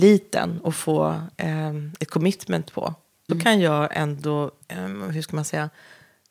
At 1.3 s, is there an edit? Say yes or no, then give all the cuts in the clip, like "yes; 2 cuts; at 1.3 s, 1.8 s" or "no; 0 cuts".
no; 2 cuts; at 3.3 s, 4.6 s